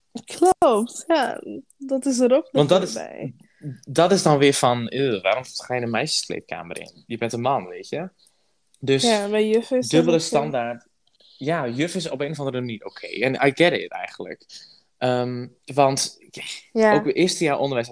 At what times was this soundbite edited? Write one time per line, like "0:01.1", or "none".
0:15.6